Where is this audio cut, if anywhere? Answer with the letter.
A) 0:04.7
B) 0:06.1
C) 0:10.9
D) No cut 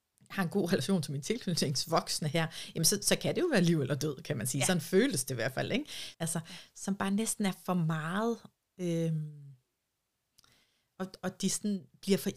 B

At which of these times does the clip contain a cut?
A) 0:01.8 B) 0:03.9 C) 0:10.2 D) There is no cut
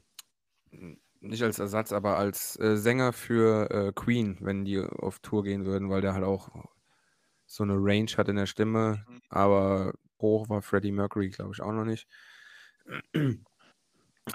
C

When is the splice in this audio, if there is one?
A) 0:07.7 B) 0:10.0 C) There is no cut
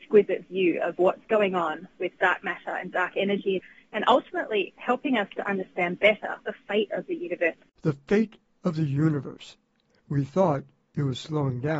B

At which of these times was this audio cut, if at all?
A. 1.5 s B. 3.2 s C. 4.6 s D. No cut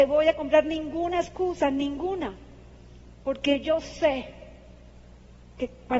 D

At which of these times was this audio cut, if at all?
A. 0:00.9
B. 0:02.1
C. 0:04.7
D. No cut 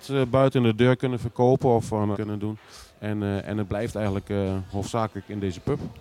B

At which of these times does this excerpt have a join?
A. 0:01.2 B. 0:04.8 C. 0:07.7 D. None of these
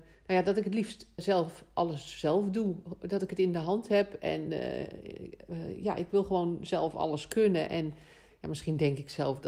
A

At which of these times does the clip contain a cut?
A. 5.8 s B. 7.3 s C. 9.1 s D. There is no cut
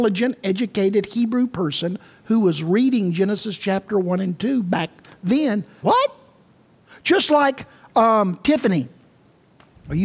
A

